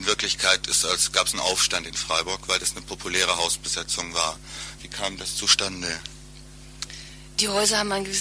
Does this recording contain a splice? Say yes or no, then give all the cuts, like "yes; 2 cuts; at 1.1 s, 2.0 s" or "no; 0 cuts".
yes; 1 cut; at 4.8 s